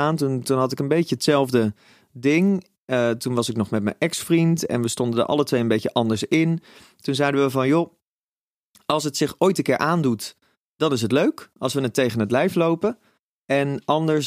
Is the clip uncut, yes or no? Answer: yes